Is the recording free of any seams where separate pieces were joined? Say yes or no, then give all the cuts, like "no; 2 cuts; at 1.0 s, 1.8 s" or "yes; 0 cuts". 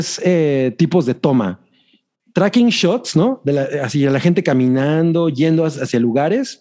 yes; 0 cuts